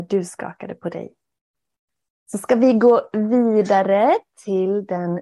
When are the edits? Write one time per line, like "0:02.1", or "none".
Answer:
0:02.2